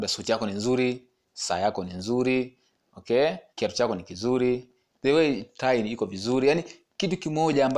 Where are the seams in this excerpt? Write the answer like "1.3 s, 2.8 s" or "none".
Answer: 3.5 s